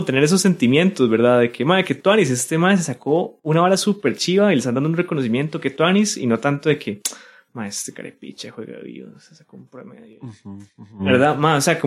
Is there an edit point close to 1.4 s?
no; 0 cuts

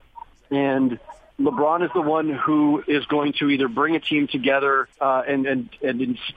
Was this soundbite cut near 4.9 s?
yes; 1 cut; at 4.9 s

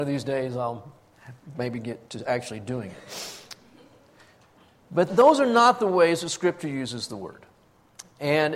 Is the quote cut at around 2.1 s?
yes; 2 cuts; at 2.1 s, 5.1 s

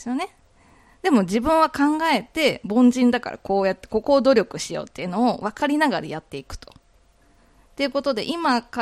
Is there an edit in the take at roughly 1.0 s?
no; 1 cut; at 7.7 s

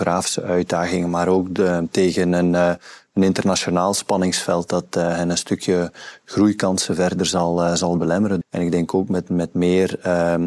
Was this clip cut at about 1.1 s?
no; 1 cut; at 8.4 s

